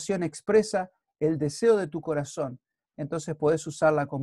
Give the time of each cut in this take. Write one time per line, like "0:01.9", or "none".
none